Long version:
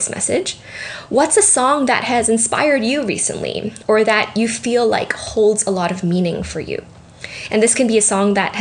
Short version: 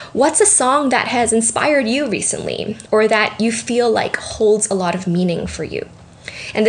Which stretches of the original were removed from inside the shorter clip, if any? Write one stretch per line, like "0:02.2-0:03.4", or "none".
none